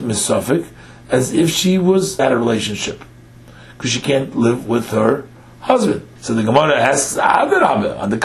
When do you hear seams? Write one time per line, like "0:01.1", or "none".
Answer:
0:02.2
0:06.2

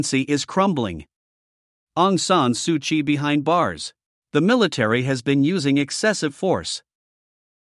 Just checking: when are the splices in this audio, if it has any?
0:04.2

